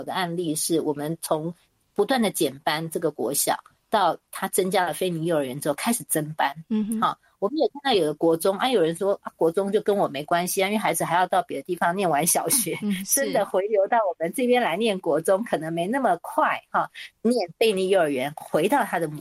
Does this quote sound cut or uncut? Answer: cut